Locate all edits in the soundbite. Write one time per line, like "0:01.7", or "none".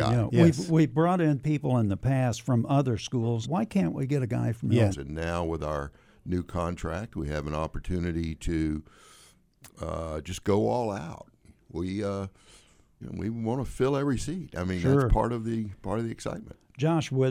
0:03.4
0:04.9
0:13.0